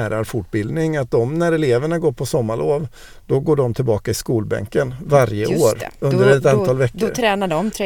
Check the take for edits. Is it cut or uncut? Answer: uncut